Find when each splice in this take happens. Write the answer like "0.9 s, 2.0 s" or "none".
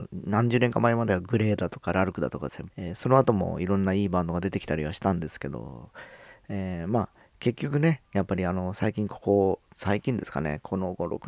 2.7 s